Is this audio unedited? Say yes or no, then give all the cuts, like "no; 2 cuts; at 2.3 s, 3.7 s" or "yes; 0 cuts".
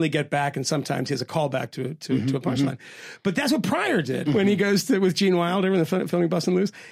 no; 1 cut; at 4.2 s